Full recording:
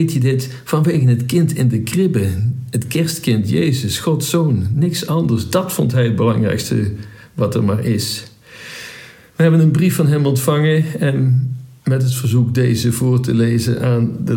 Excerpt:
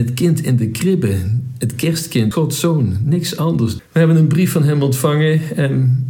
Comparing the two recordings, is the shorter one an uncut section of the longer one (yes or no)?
no